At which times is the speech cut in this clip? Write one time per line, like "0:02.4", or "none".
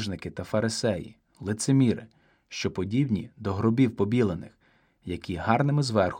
none